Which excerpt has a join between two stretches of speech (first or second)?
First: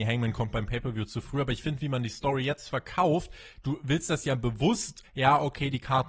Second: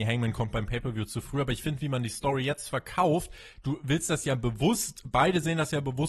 first